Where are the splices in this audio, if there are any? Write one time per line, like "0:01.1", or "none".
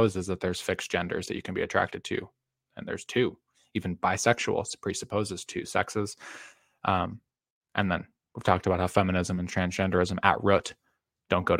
none